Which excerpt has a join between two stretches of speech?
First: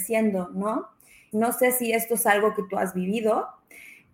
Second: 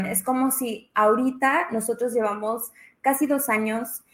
first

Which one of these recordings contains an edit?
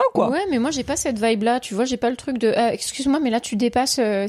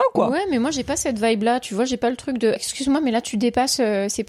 second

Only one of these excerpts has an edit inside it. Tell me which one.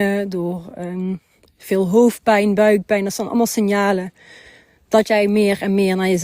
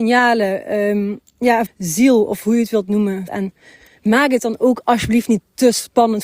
second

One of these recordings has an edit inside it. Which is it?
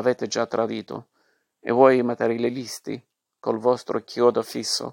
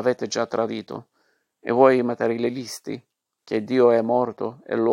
second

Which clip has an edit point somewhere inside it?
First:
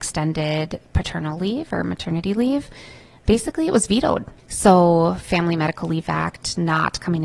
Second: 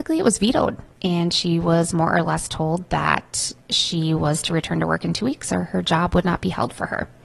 first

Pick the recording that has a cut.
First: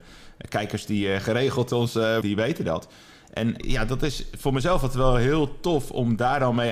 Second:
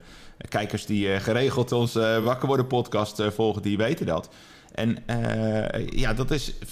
first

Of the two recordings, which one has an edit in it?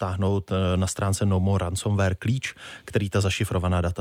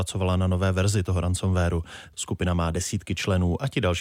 second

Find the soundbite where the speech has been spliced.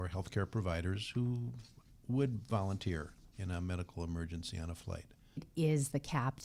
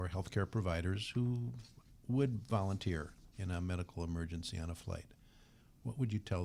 first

